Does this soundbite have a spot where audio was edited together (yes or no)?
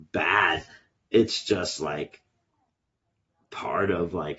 no